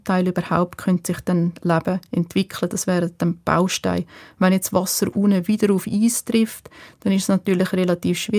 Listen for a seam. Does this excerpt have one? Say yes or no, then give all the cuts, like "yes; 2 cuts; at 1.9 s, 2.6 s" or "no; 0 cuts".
no; 0 cuts